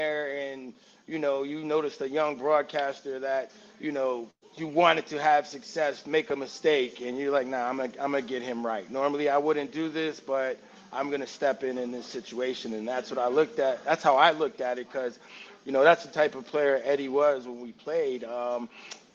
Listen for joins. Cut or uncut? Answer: uncut